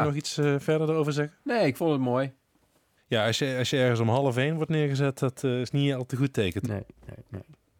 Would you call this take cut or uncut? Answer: cut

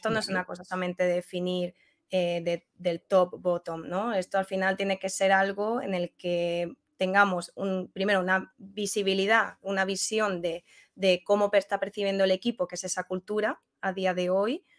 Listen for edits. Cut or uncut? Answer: cut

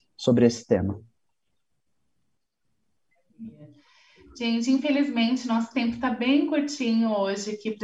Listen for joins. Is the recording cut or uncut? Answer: uncut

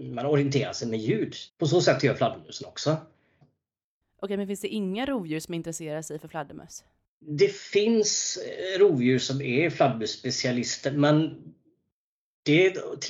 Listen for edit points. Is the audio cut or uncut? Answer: cut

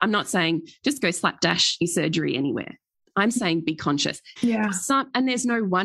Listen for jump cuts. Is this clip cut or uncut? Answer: cut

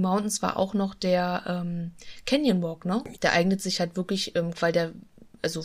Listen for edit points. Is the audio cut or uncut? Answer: cut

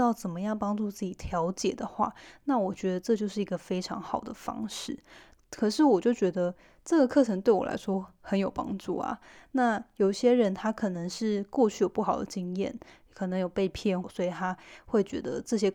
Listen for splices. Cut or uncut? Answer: cut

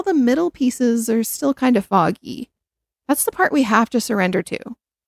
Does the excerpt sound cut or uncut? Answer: uncut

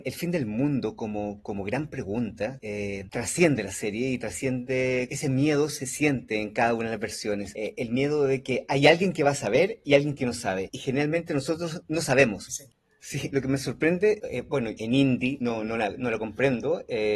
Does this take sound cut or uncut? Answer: cut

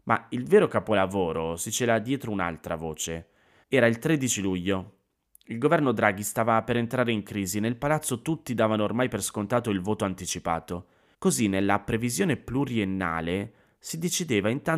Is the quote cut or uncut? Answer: cut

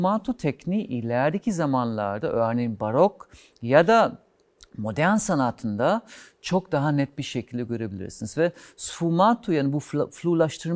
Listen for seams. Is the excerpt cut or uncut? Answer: uncut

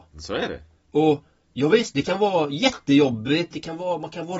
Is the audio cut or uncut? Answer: cut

